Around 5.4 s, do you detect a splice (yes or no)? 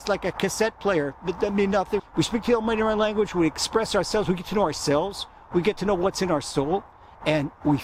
no